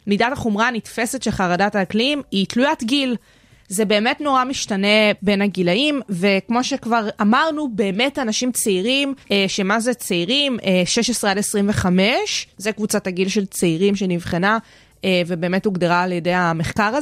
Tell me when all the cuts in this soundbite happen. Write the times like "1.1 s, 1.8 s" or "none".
9.2 s